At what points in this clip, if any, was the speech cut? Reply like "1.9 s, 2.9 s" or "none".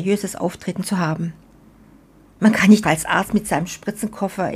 2.8 s